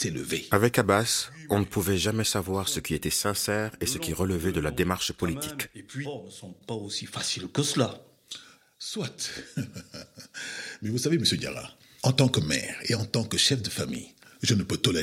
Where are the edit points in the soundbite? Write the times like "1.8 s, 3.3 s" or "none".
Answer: 6.0 s